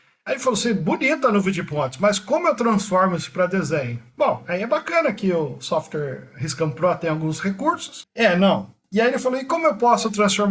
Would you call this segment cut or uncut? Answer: cut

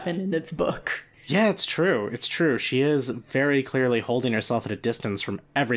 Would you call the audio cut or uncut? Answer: uncut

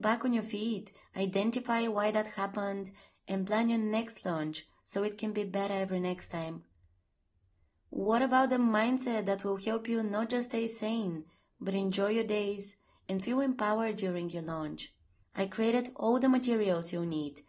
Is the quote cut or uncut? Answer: cut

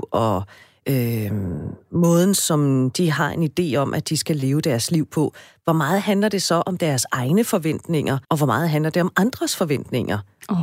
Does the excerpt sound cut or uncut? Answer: cut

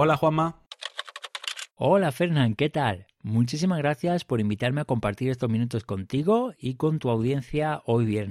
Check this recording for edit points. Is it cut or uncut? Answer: uncut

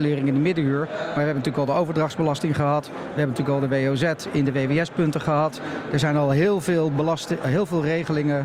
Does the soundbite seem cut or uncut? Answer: uncut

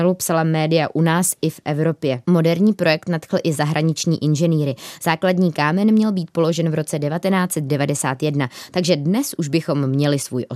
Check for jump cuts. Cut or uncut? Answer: uncut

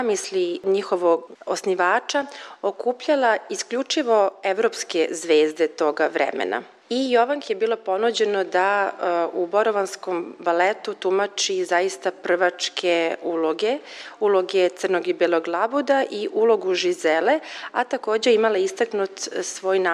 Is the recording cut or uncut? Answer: uncut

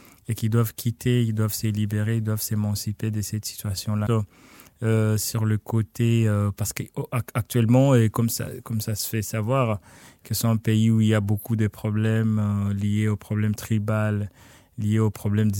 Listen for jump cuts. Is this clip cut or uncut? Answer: cut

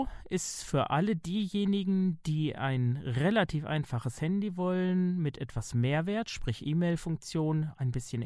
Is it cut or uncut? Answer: uncut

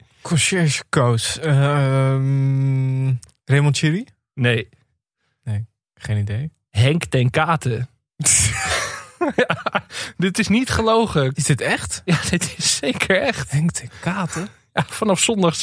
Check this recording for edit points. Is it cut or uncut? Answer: cut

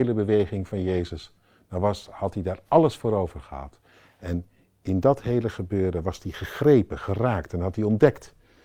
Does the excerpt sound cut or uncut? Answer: uncut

